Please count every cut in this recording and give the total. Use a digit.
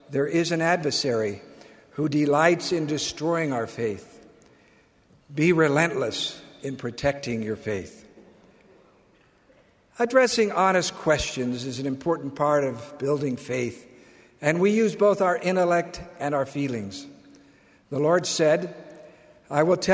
0